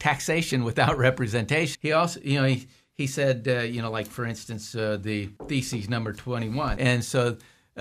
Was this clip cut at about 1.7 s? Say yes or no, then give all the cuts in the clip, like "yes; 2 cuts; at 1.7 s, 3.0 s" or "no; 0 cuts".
yes; 3 cuts; at 1.7 s, 5.4 s, 6.8 s